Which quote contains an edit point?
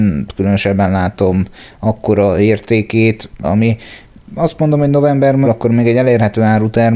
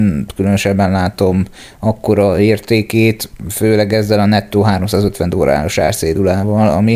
first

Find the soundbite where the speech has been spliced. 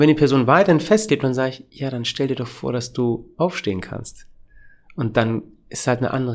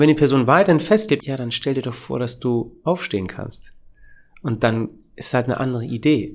second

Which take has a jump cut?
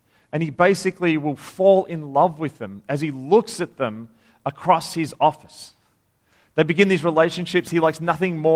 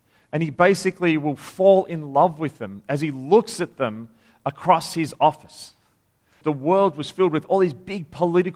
second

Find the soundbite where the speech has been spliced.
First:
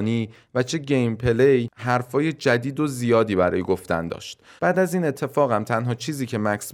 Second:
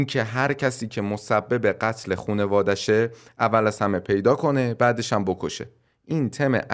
first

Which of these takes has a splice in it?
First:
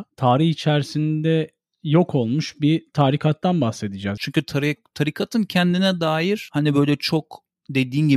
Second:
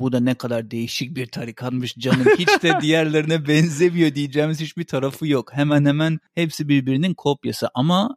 first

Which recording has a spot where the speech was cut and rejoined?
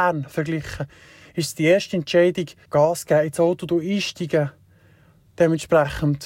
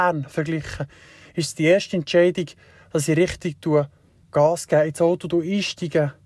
first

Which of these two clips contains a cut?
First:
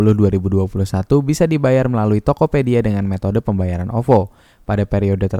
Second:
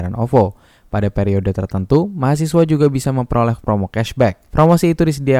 second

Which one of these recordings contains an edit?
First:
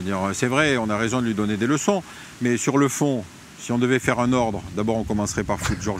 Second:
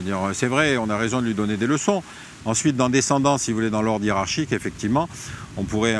second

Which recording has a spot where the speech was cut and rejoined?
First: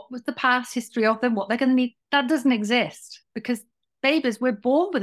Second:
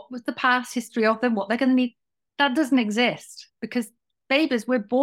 first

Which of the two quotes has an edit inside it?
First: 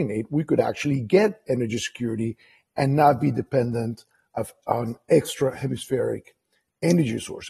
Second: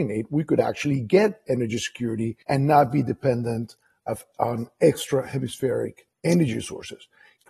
second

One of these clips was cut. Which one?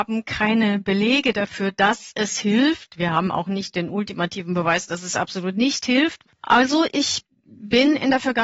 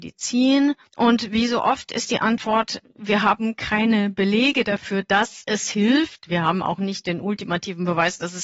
first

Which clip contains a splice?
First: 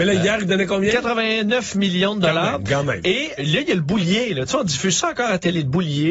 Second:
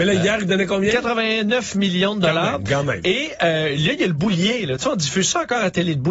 first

